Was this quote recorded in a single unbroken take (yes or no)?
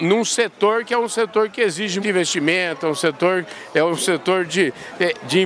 no